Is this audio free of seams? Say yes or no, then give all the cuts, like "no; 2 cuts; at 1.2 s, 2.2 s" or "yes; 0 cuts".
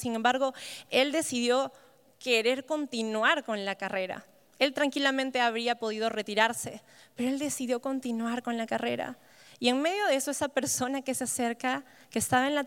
yes; 0 cuts